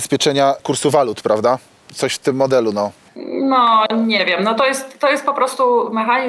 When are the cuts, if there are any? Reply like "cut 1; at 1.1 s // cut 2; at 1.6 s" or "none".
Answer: none